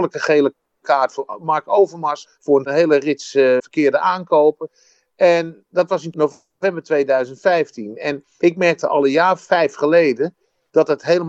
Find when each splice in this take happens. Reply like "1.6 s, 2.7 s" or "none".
3.6 s